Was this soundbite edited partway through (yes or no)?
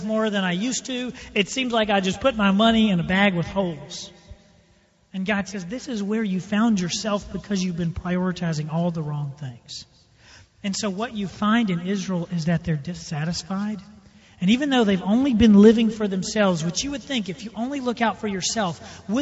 no